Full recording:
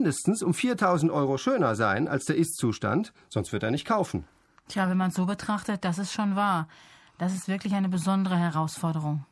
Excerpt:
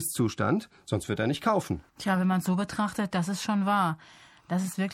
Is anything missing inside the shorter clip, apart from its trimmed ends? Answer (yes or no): yes